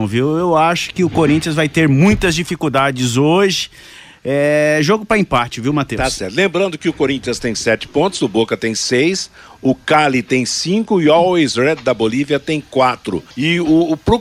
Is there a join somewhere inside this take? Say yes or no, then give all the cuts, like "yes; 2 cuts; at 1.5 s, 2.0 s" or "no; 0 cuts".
yes; 1 cut; at 13.3 s